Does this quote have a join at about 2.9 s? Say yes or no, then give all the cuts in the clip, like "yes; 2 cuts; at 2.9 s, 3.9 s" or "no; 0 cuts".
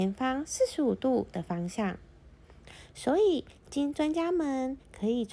no; 0 cuts